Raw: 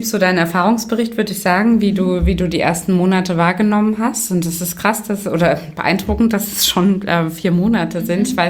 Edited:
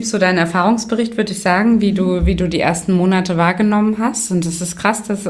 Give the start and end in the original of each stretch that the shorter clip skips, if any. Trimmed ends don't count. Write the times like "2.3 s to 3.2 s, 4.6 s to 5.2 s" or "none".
none